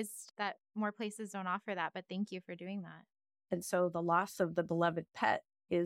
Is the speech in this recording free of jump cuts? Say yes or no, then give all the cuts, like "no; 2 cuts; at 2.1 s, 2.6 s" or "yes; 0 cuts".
no; 1 cut; at 3.5 s